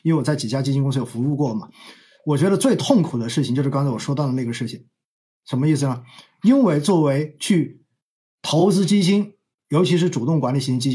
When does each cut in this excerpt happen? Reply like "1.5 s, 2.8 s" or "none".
none